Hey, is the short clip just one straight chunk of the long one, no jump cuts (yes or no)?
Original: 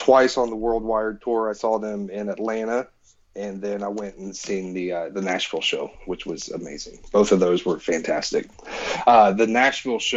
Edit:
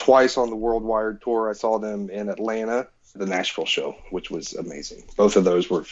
no